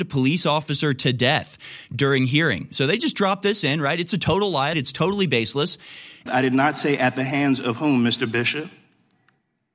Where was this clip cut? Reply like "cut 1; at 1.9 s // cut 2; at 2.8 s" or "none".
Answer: cut 1; at 4.7 s // cut 2; at 6.3 s